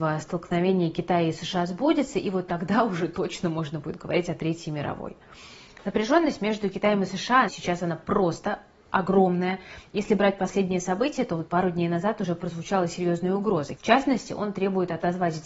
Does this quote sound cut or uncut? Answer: cut